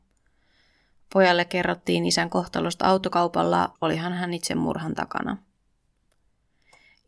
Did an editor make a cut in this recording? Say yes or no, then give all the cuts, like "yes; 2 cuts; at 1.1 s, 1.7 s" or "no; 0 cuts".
yes; 1 cut; at 3.8 s